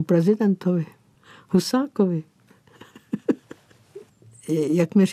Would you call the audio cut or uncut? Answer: uncut